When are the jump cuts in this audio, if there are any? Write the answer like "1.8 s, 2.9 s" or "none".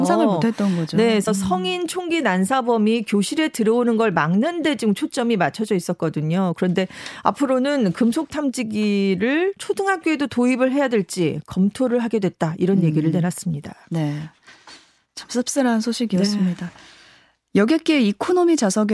none